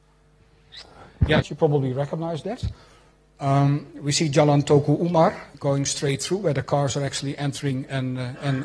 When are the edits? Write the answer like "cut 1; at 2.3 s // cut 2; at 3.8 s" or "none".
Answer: cut 1; at 1.4 s // cut 2; at 5.5 s

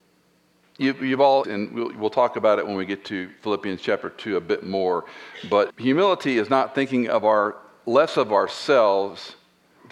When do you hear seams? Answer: cut 1; at 1.4 s // cut 2; at 5.7 s

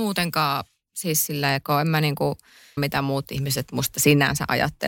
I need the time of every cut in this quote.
cut 1; at 2.8 s

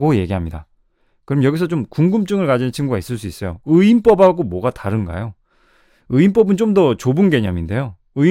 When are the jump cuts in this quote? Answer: none

